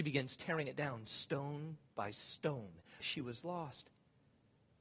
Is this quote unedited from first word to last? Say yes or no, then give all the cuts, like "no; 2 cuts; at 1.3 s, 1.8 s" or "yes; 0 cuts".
no; 1 cut; at 3.0 s